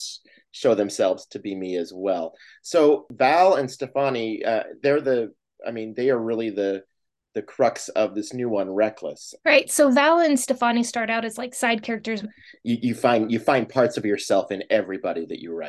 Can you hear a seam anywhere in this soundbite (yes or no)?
yes